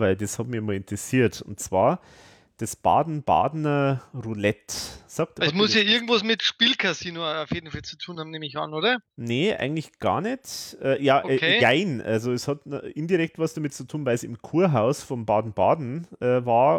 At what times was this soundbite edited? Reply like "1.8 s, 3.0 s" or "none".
none